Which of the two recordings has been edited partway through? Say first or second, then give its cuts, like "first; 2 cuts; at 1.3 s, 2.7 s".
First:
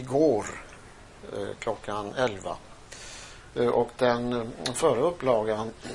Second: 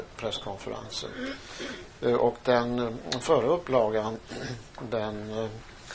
first; 1 cut; at 3.5 s